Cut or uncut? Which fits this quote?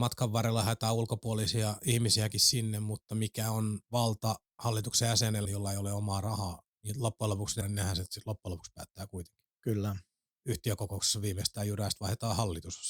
cut